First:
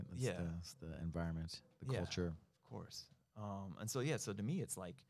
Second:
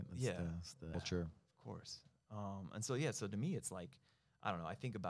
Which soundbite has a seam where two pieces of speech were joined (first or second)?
second